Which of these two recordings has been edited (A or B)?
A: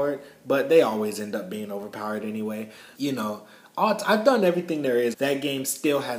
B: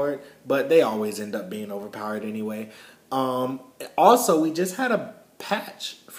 A